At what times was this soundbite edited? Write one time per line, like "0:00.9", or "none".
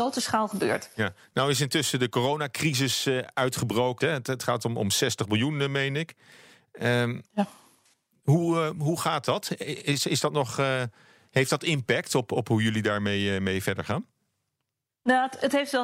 0:04.0